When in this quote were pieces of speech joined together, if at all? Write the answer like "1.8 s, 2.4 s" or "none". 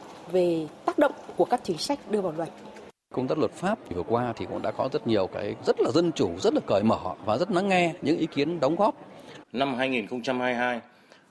5.6 s, 9.4 s